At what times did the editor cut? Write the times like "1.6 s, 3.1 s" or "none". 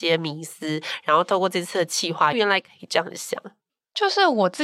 2.3 s